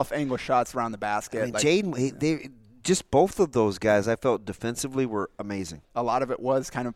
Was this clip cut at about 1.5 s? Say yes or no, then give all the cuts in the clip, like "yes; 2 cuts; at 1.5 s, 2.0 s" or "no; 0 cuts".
no; 1 cut; at 5.8 s